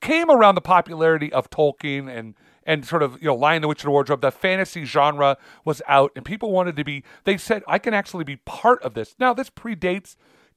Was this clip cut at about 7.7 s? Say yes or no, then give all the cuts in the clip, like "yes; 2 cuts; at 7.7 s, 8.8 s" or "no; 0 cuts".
yes; 1 cut; at 7.7 s